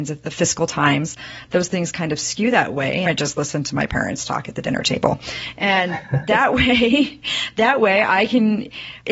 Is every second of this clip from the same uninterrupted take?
no; 1 cut; at 3.1 s

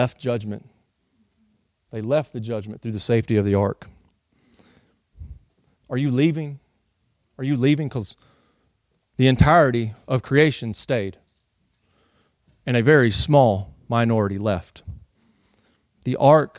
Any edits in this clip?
yes; 1 cut; at 5.8 s

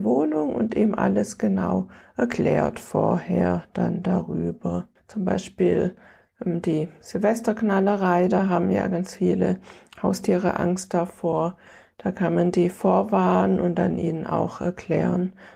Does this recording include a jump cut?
yes; 1 cut; at 5.0 s

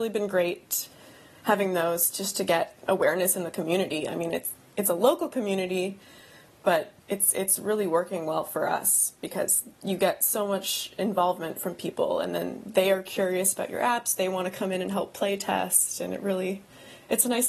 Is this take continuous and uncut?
yes; 0 cuts

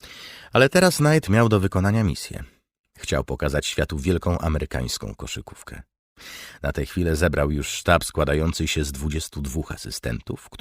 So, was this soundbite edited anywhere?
no; 0 cuts

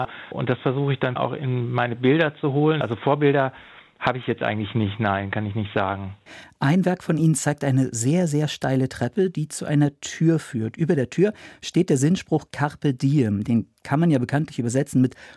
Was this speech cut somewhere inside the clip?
yes; 2 cuts; at 1.2 s, 2.8 s

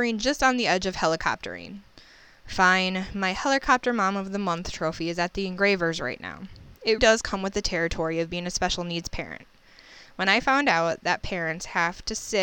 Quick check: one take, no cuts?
no; 1 cut; at 7.0 s

